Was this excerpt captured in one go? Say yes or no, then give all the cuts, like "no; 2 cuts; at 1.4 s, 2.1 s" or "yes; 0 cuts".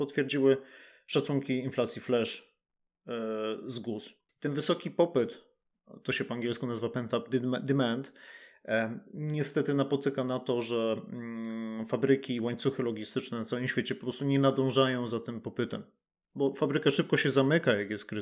no; 1 cut; at 4.3 s